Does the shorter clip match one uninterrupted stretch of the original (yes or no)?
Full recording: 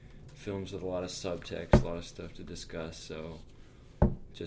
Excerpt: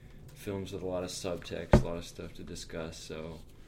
yes